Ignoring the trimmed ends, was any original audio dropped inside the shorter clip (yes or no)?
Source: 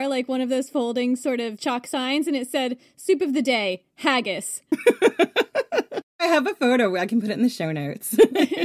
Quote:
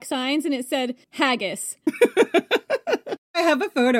yes